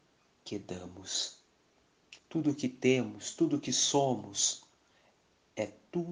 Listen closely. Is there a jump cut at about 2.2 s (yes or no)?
yes